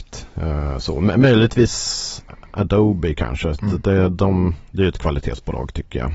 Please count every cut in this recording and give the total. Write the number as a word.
zero